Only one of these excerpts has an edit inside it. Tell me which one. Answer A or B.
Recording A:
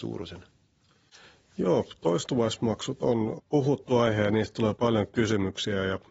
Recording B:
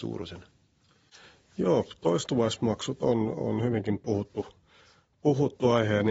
A